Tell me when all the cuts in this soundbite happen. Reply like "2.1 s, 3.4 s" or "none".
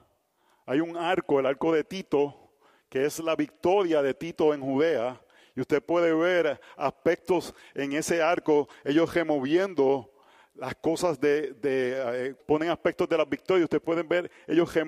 12.4 s